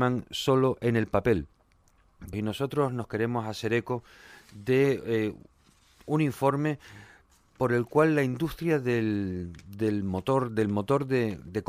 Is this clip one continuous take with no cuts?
no; 1 cut; at 2.3 s

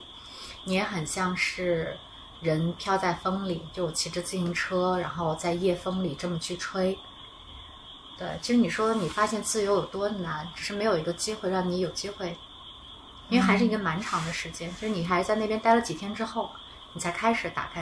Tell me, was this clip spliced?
yes; 1 cut; at 8.2 s

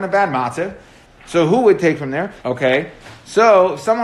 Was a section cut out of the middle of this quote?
yes; 2 cuts; at 1.1 s, 2.4 s

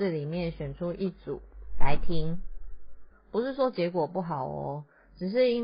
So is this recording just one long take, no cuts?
no; 1 cut; at 3.1 s

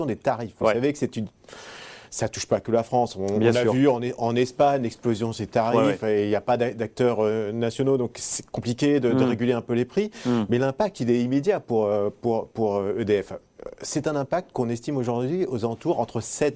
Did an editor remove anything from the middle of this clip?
no; 0 cuts

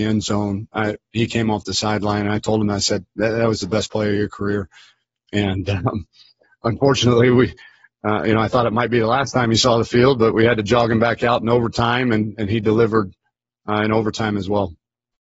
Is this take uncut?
yes; 0 cuts

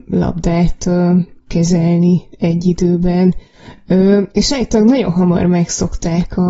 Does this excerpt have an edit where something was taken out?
no; 0 cuts

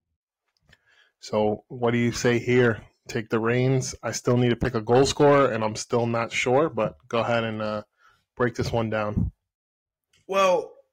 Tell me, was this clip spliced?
no; 0 cuts

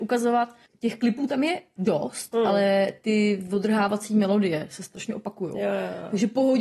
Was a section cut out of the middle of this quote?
no; 0 cuts

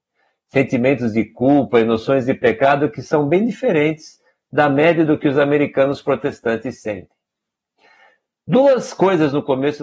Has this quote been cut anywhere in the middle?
no; 0 cuts

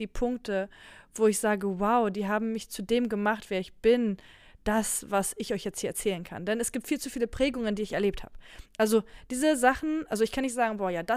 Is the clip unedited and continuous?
yes; 0 cuts

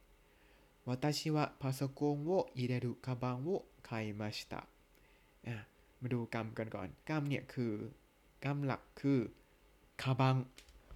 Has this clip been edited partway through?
yes; 1 cut; at 7.0 s

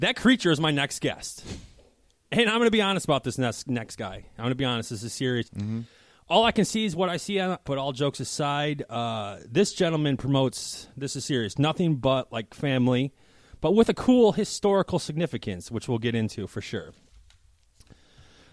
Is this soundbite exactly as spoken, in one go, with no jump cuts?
no; 2 cuts; at 5.4 s, 7.6 s

